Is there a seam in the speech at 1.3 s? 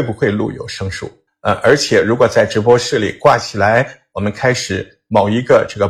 yes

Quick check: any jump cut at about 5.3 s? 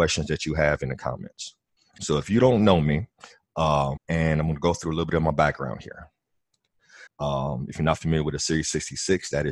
no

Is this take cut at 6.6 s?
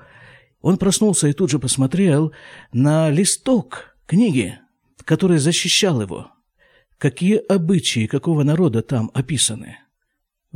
no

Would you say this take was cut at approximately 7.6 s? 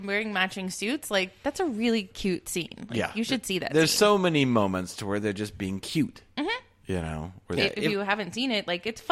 yes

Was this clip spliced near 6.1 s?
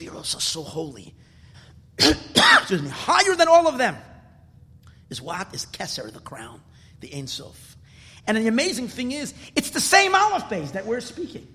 no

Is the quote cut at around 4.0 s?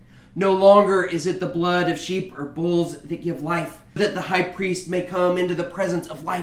yes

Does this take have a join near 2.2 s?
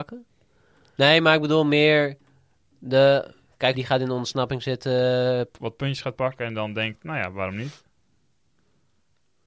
no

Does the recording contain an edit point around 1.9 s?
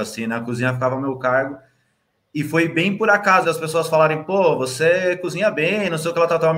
no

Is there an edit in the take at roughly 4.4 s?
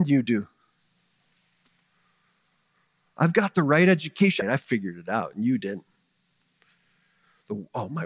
yes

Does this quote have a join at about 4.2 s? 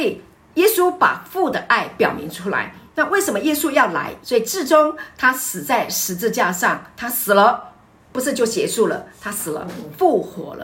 yes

